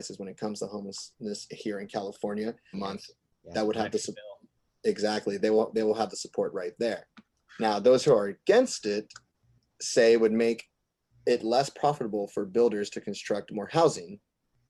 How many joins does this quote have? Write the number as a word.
one